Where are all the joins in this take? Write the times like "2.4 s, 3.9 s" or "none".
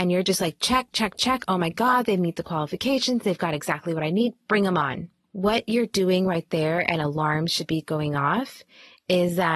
none